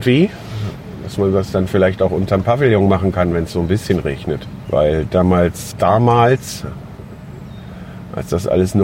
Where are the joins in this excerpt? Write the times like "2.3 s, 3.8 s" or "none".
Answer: 4.7 s, 5.7 s